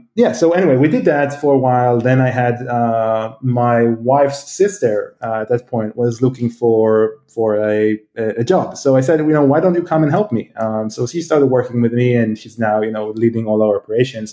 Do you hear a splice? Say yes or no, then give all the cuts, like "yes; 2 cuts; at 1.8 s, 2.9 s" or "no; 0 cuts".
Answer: no; 0 cuts